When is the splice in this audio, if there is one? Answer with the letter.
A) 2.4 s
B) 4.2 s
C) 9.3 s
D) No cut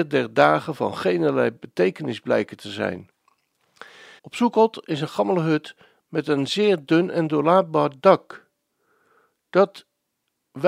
B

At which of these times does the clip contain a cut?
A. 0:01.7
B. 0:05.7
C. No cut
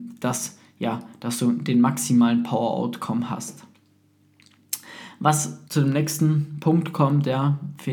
B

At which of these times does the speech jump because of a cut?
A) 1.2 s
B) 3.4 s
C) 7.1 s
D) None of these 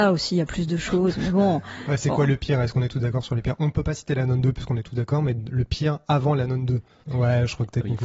C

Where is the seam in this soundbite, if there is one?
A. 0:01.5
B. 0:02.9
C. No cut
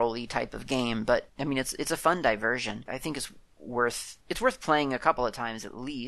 B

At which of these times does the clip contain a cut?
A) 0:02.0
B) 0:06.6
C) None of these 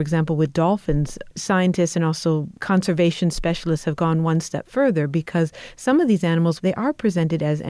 B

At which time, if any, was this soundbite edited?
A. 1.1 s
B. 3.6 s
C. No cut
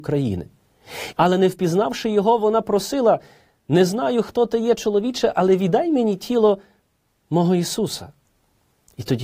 A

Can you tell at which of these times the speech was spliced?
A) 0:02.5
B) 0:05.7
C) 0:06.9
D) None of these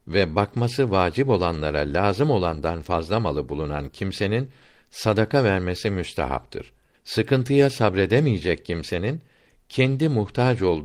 C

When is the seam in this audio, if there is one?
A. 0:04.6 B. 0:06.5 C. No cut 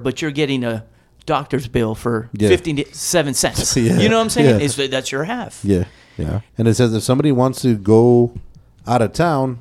B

